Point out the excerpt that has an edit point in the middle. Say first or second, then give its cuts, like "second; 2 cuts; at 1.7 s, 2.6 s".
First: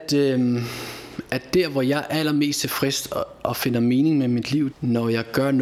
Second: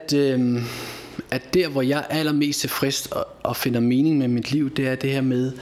first; 1 cut; at 4.7 s